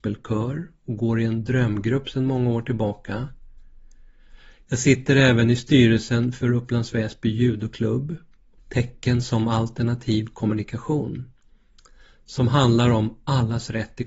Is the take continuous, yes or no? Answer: no